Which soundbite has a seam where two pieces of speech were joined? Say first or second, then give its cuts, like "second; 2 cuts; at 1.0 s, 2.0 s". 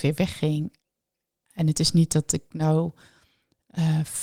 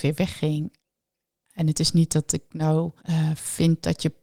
second; 1 cut; at 3.0 s